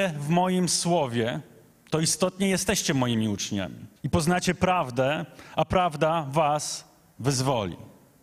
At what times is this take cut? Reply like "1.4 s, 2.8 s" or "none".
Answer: 4.0 s